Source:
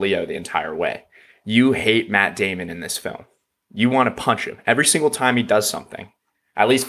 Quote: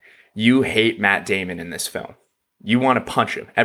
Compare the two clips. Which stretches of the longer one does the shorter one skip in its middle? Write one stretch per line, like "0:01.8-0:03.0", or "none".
none